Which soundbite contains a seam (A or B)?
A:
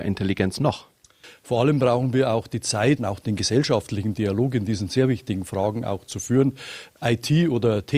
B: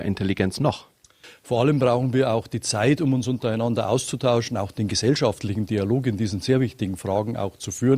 A